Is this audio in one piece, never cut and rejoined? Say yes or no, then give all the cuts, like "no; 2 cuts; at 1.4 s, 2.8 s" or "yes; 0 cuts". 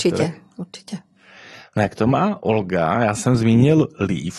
yes; 0 cuts